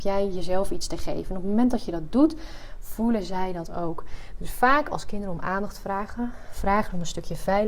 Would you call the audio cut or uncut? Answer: uncut